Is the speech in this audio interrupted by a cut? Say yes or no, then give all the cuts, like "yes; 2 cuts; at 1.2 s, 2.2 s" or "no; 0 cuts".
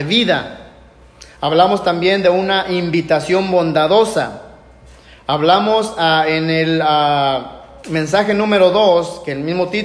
no; 0 cuts